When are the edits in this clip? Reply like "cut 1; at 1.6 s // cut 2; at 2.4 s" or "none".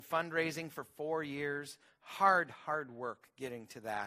none